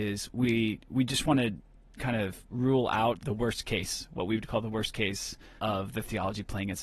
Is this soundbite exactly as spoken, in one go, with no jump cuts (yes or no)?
no